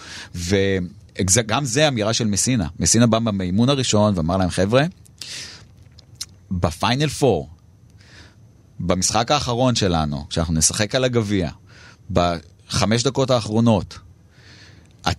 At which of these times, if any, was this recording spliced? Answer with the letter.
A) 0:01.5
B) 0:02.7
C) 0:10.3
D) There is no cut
D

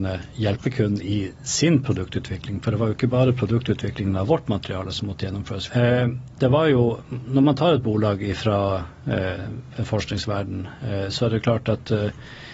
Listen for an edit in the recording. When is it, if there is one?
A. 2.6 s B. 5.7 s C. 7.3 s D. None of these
B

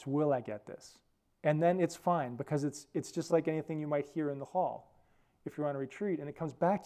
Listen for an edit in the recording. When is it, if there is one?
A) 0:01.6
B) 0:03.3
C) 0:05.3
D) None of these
D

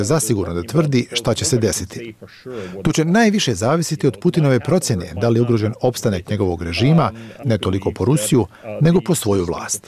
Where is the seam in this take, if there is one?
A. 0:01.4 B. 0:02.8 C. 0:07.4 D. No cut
C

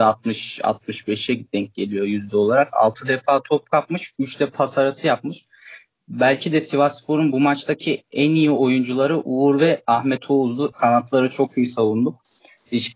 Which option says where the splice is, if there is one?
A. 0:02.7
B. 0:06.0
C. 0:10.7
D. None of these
C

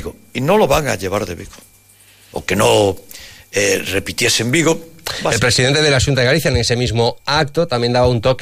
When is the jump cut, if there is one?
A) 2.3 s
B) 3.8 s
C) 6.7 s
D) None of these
A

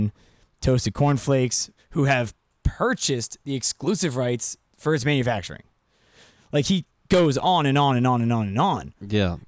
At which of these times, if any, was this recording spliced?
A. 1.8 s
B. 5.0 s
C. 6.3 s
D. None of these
A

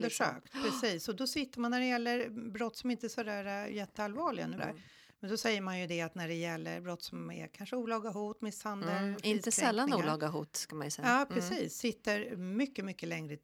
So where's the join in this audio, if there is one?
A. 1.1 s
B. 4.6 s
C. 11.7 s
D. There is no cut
B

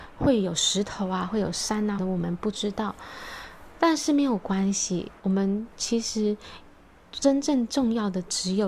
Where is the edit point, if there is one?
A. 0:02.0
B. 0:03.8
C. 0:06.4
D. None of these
A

